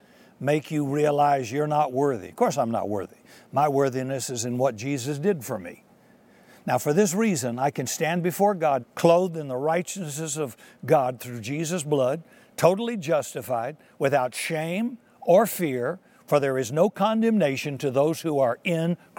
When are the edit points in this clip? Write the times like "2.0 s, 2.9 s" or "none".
8.8 s, 16.2 s